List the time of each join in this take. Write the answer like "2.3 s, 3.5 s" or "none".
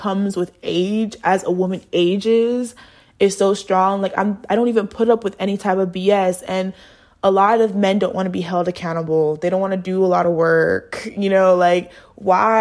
none